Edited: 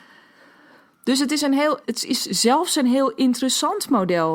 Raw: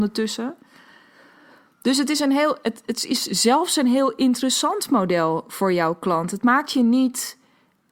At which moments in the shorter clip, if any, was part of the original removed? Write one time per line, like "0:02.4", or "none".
0:01.8